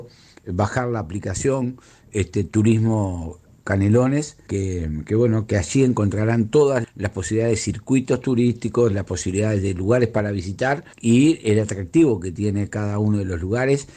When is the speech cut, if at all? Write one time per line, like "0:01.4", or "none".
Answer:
0:04.5
0:06.8
0:10.9